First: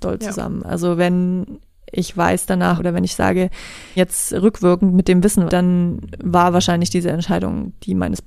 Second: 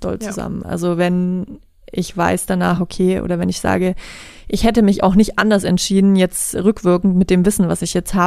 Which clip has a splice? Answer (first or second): first